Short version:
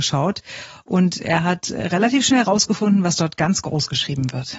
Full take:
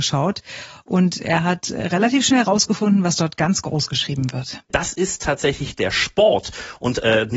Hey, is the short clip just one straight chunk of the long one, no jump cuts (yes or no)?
yes